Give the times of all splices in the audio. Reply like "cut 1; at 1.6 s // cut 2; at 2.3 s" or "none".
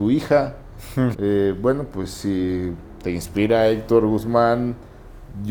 cut 1; at 1.1 s